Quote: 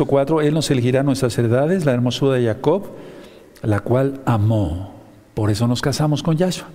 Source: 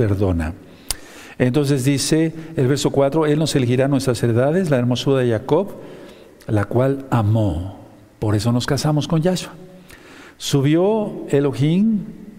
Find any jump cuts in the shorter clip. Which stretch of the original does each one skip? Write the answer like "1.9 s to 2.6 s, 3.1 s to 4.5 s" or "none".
none